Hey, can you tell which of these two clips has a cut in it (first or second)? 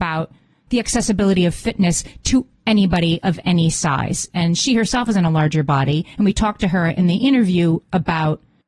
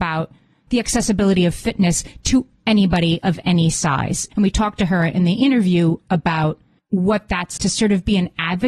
second